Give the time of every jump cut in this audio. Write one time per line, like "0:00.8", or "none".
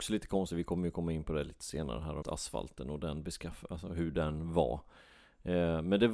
0:02.2